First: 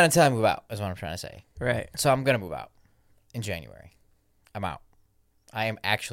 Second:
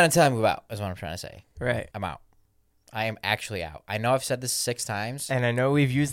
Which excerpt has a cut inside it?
second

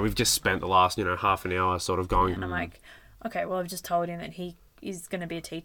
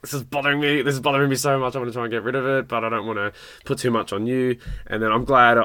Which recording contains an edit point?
first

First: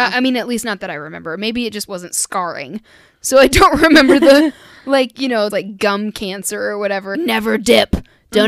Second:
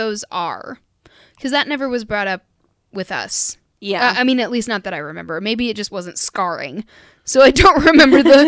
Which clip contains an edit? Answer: first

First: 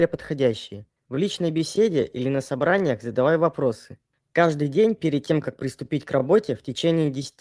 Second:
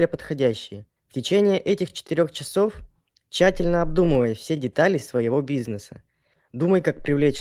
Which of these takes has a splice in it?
first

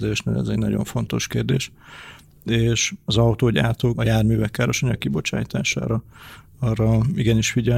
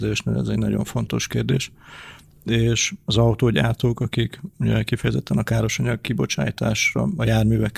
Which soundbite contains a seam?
first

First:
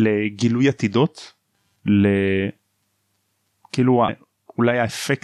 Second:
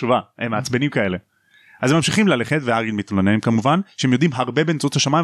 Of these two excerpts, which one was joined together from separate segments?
first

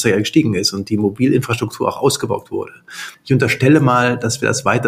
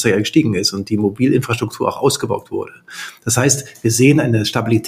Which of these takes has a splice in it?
first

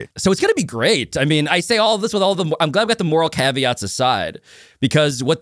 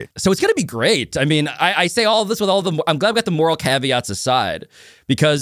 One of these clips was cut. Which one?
first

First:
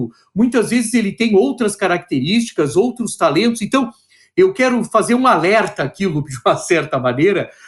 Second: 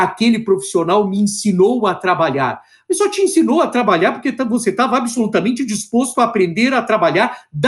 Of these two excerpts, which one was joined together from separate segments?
first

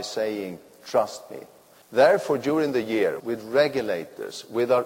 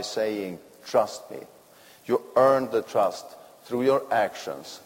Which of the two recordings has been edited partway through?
first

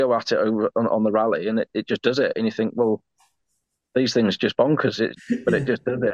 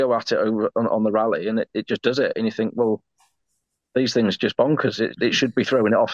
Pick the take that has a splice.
first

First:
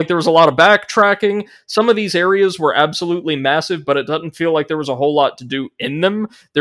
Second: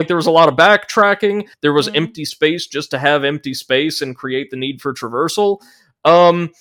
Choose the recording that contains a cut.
second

